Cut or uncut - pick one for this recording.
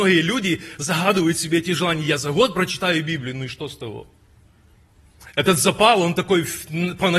uncut